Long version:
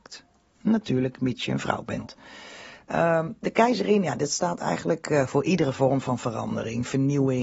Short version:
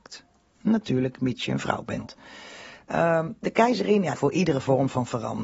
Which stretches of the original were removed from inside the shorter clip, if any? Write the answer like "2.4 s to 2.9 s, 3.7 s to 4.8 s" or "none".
4.1 s to 5.3 s

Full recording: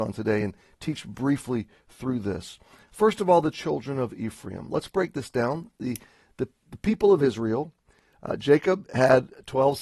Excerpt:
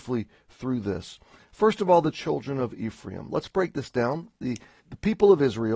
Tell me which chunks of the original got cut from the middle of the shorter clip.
6.2 s to 6.6 s

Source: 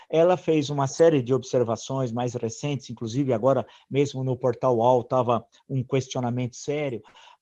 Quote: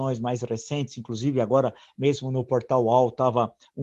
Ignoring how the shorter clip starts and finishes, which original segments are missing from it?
none

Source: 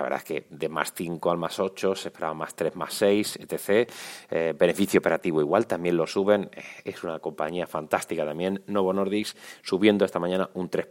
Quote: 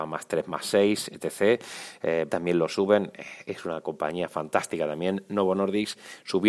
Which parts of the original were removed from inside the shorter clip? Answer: 4.6 s to 5.7 s

